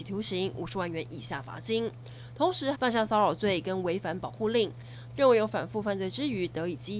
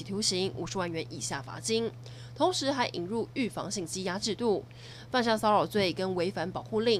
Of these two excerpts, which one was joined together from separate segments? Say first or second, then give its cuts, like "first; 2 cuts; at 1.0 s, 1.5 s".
first; 2 cuts; at 2.7 s, 5.1 s